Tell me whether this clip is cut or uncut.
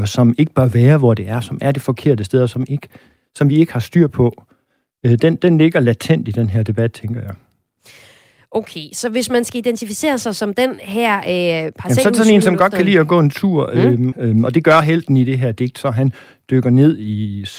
cut